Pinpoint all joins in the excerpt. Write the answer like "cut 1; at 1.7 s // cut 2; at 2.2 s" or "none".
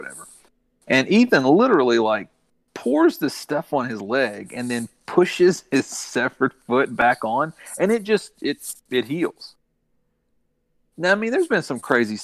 none